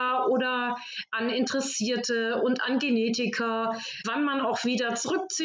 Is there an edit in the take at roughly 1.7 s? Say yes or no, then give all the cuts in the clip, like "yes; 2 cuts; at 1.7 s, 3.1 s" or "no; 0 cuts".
no; 1 cut; at 4.0 s